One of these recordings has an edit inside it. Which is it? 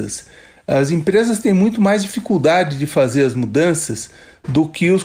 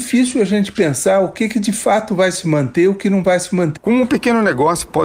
second; 1 cut; at 3.8 s

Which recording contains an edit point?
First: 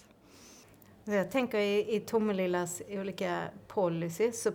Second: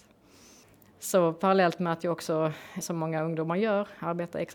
second; 2 cuts; at 0.9 s, 2.8 s

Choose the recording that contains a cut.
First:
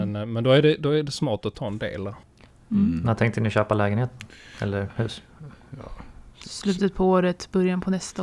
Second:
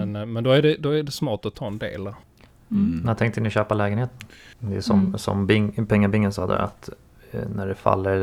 second; 1 cut; at 4.5 s

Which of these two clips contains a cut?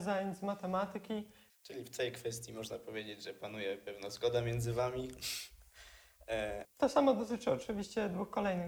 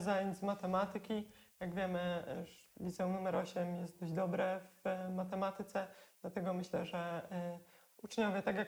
first; 2 cuts; at 1.5 s, 6.6 s

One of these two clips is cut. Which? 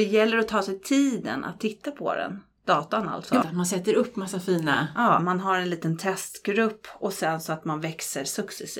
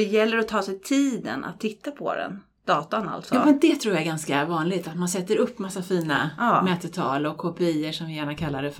first; 2 cuts; at 3.4 s, 5.2 s

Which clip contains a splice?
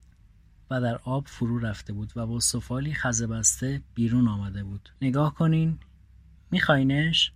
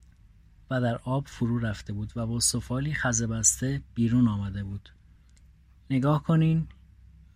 first; 1 cut; at 5.0 s

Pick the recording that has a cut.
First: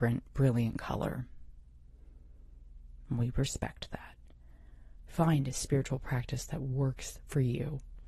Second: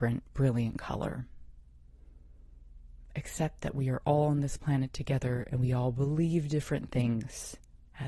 first; 1 cut; at 3.1 s

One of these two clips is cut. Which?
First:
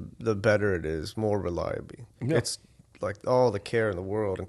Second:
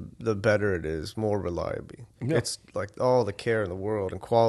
second; 1 cut; at 2.7 s

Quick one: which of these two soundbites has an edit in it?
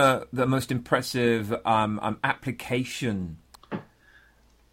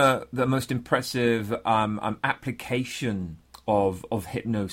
first; 1 cut; at 3.5 s

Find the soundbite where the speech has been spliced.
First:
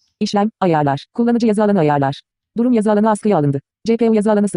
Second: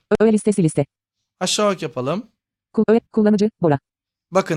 second; 1 cut; at 3.1 s

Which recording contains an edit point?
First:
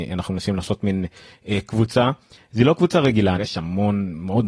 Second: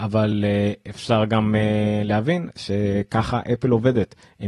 first; 1 cut; at 3.4 s

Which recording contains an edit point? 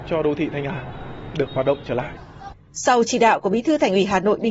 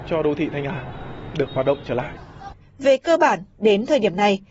second; 1 cut; at 2.6 s

